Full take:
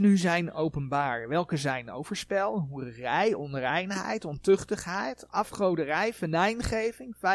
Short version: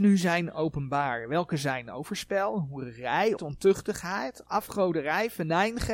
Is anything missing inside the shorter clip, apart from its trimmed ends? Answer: yes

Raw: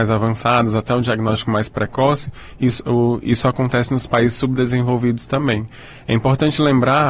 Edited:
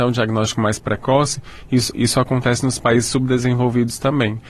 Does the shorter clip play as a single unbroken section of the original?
no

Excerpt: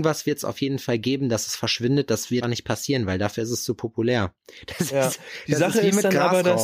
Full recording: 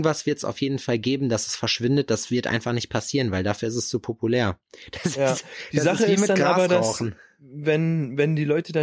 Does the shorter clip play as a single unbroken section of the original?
no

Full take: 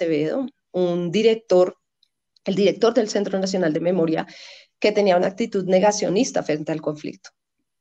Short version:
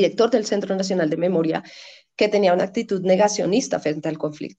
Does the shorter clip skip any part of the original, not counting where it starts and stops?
no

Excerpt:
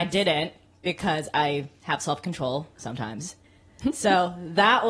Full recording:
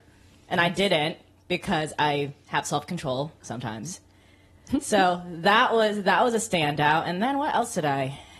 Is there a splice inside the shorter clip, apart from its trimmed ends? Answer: yes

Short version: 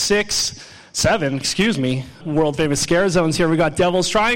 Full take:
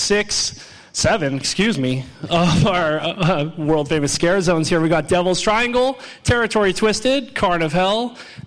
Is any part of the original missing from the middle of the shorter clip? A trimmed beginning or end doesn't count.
yes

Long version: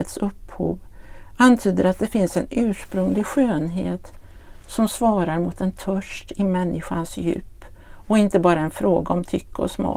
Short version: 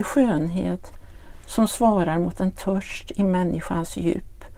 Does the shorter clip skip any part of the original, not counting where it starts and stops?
no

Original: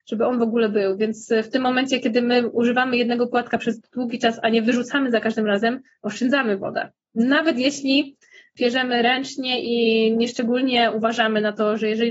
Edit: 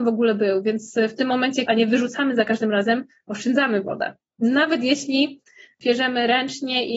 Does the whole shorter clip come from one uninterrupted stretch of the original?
no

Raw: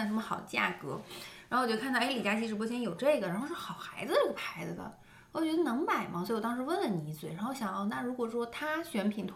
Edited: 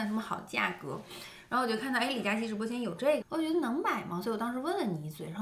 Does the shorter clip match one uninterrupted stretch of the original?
no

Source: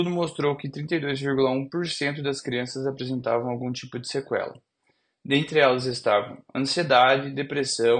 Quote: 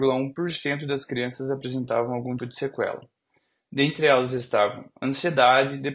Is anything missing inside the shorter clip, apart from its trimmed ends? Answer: yes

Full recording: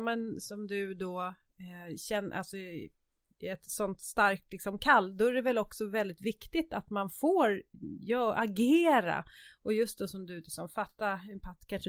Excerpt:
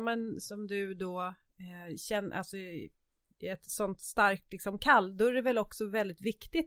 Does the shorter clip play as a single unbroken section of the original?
yes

